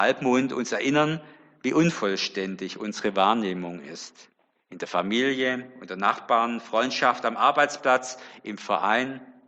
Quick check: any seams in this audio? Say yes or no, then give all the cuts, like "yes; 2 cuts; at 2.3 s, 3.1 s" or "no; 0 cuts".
yes; 1 cut; at 4.5 s